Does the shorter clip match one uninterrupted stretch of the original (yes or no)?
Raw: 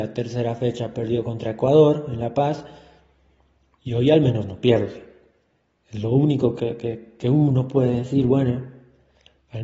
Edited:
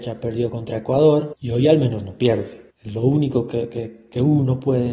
no